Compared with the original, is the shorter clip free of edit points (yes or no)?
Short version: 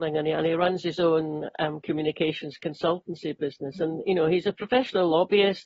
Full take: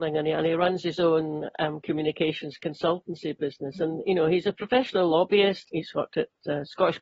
yes